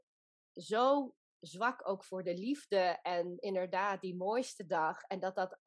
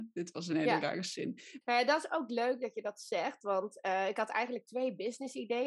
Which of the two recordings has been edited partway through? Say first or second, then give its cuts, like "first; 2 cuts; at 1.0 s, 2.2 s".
second; 1 cut; at 1.6 s